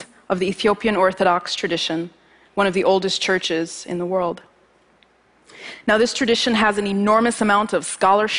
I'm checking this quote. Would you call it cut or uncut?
uncut